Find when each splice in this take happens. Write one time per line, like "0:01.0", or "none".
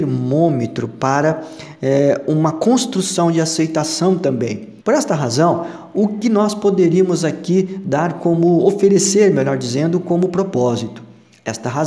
0:04.8